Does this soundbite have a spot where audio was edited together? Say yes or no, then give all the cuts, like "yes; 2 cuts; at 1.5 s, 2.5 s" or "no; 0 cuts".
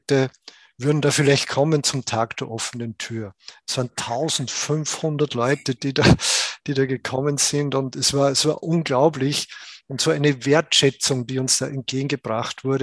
yes; 1 cut; at 8.6 s